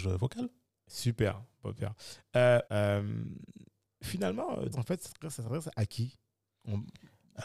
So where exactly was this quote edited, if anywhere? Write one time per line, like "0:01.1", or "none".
0:02.7
0:04.7